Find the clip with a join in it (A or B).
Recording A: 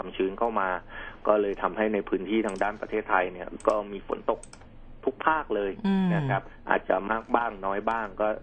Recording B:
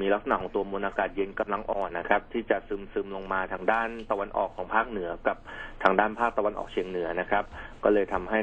B